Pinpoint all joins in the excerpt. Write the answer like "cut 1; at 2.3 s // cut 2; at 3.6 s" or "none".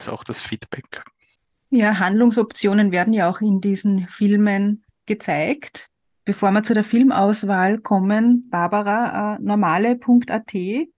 none